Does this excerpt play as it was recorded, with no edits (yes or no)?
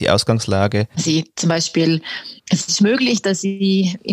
no